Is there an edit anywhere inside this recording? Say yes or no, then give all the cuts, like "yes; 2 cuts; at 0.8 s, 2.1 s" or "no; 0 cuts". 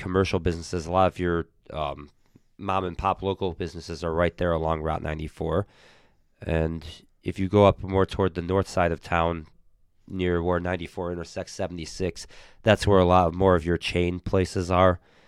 no; 0 cuts